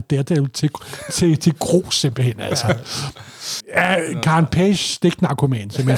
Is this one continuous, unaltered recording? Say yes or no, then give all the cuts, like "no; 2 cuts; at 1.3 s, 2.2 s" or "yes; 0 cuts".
no; 1 cut; at 3.6 s